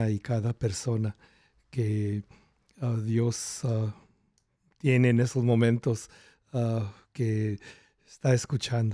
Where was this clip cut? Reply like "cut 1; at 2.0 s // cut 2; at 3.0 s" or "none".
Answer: none